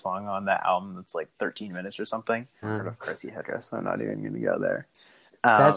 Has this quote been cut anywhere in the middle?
yes; 1 cut; at 2.6 s

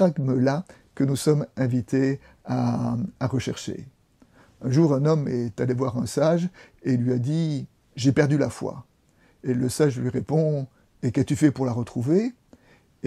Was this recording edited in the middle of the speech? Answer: no; 0 cuts

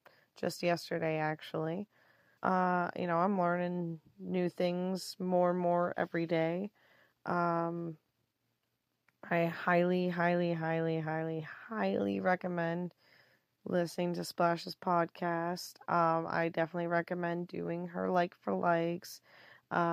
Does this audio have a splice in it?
yes; 1 cut; at 2.4 s

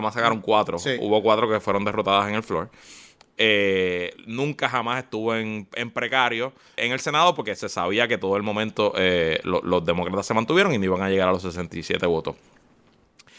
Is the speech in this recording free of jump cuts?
no; 1 cut; at 6.8 s

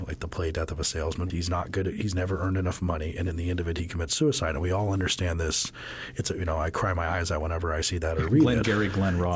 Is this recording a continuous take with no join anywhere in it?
no; 1 cut; at 1.3 s

